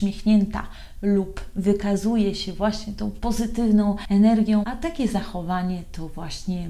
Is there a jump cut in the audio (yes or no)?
yes